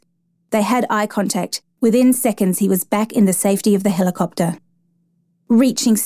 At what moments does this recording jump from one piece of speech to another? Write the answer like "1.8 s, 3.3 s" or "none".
1.8 s